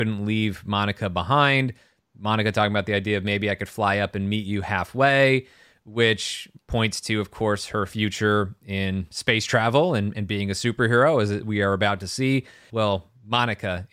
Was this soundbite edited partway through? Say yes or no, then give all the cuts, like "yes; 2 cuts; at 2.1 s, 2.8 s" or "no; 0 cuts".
yes; 1 cut; at 12.7 s